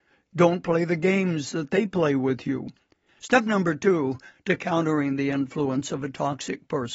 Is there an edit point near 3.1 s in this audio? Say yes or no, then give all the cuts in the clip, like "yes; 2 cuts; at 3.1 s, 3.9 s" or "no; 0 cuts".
yes; 1 cut; at 3.1 s